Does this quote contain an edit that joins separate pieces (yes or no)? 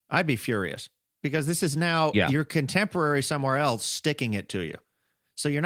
no